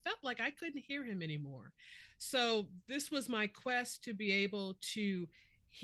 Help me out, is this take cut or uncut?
uncut